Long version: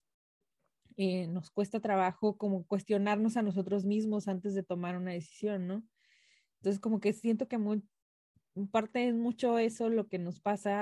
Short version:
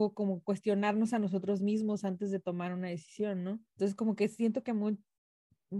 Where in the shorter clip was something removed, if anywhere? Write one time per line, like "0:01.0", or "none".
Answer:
0:03.7